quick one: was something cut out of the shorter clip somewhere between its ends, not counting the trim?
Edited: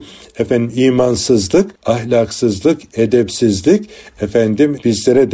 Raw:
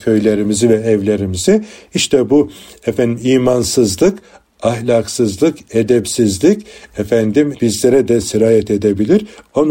yes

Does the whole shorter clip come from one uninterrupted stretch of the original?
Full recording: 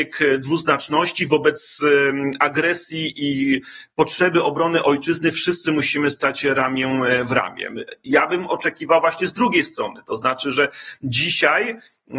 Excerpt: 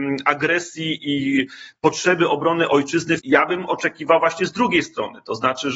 no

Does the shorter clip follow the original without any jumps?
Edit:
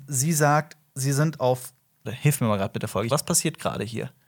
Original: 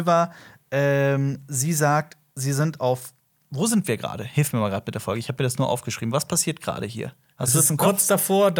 no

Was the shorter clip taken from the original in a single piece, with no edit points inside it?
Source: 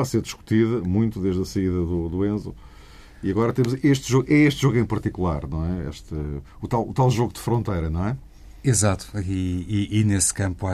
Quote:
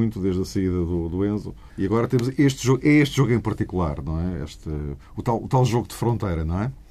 no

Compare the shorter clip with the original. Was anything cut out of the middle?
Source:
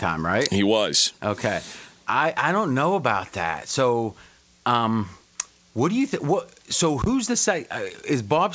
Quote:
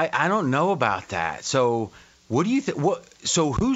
yes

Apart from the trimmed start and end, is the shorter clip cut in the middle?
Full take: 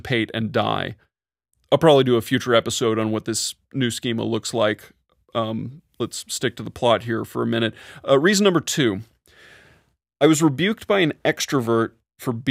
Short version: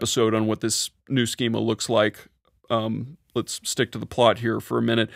no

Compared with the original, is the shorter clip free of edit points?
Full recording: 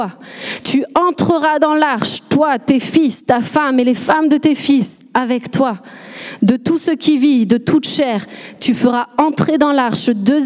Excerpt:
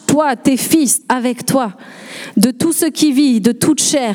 no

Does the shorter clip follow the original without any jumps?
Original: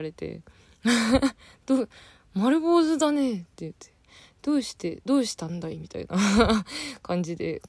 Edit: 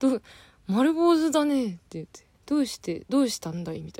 no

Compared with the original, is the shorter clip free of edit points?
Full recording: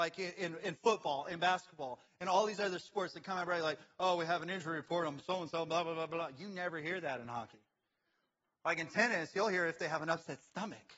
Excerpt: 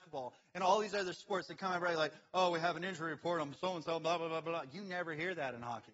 yes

